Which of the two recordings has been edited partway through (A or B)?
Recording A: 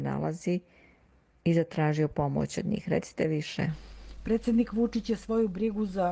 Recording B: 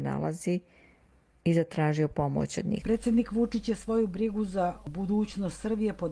B